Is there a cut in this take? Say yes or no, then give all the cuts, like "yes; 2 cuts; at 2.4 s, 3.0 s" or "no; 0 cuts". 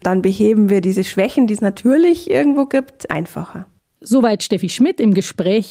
no; 0 cuts